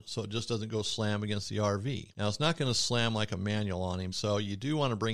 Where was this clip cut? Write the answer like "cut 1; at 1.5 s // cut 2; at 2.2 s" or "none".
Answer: cut 1; at 4.1 s